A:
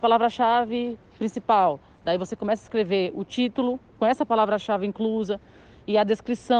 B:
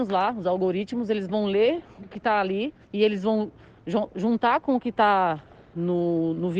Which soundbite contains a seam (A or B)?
B